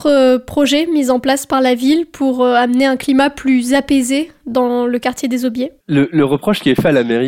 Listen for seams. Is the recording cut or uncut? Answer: cut